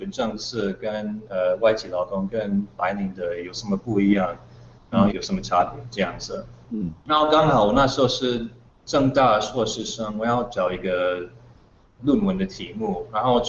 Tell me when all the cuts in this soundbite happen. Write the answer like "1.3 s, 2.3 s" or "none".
5.1 s, 6.6 s